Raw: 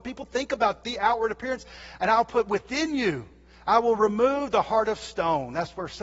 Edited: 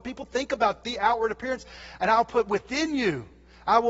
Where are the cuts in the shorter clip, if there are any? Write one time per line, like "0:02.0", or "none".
none

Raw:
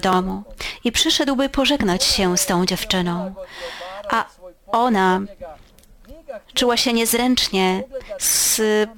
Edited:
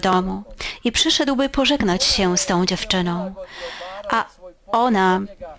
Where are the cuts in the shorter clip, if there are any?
none

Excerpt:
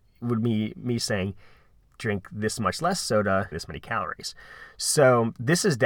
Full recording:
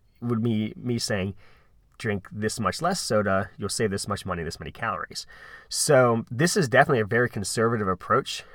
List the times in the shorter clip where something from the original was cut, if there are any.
0:03.5

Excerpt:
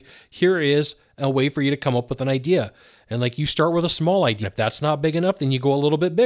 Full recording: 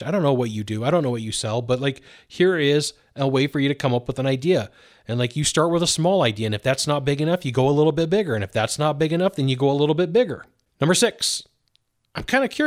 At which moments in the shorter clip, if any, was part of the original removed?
0:04.4

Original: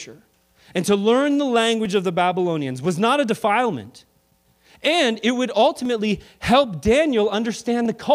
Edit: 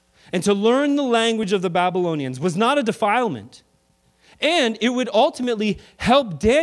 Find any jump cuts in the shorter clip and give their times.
none

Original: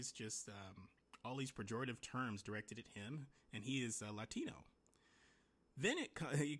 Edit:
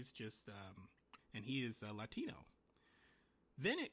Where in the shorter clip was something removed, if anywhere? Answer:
0:01.2

